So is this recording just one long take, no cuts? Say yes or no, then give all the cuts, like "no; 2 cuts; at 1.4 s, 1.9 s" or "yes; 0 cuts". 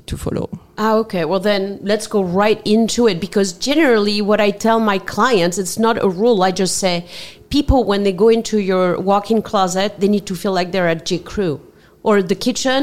yes; 0 cuts